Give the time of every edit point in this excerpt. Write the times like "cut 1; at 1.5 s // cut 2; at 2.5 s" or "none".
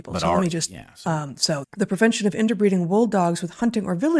cut 1; at 1.6 s